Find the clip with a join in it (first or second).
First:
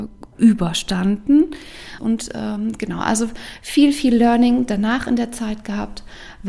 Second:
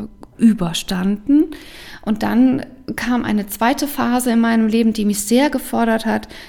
first